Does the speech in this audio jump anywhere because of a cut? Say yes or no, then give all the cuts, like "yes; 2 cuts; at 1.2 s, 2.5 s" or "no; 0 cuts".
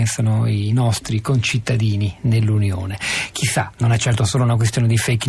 no; 0 cuts